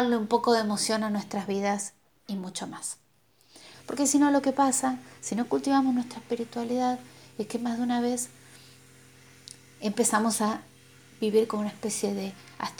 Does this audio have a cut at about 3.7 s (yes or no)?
yes